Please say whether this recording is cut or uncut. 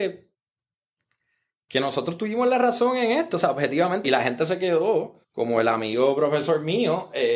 cut